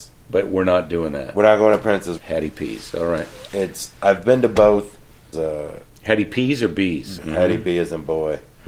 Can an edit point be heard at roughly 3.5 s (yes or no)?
no